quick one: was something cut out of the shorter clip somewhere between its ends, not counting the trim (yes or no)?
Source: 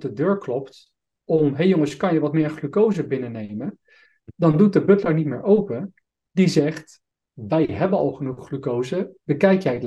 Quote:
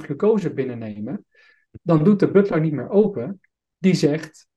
no